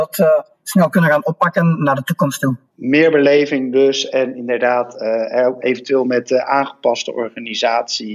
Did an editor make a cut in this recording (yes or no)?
yes